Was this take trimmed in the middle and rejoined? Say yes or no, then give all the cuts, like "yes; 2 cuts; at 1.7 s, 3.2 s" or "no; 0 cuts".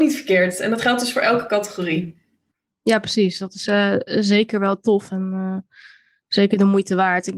no; 0 cuts